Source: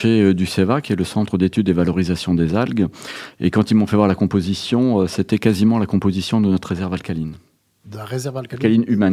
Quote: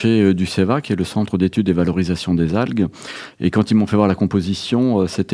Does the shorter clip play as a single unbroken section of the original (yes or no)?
yes